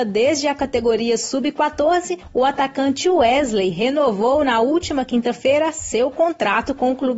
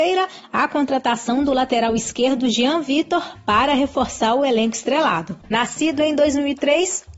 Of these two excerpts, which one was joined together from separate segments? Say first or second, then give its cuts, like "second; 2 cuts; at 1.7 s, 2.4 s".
second; 1 cut; at 5.4 s